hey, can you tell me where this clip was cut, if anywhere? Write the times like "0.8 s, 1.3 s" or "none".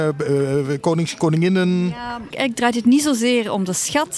2.3 s